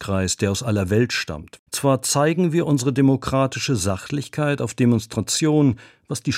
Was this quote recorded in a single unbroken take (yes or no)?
no